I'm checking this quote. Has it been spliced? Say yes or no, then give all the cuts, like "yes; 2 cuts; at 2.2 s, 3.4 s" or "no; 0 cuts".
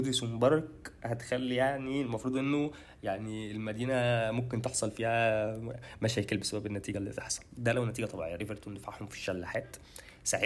yes; 1 cut; at 8.4 s